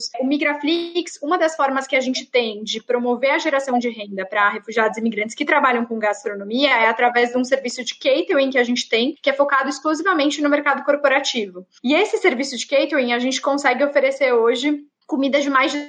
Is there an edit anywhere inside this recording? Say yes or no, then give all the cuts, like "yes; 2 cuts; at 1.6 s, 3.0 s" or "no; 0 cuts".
no; 0 cuts